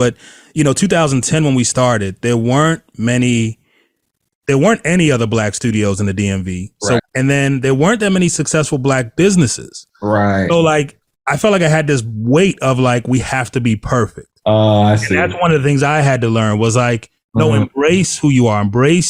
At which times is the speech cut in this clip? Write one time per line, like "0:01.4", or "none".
0:07.0